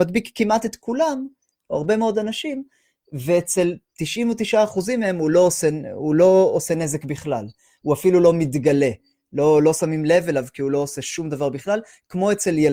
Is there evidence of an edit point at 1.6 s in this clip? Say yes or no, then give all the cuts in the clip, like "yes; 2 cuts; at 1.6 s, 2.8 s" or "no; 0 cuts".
no; 0 cuts